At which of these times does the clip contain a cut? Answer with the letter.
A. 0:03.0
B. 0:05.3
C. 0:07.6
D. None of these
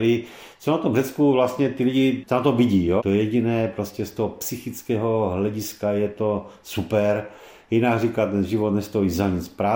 A